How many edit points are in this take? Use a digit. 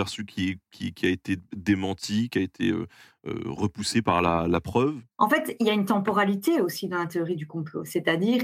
0